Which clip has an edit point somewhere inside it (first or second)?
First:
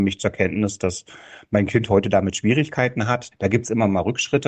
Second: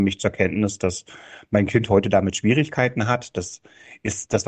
first